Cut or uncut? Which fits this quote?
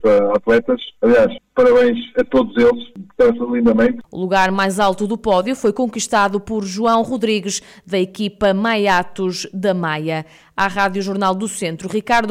cut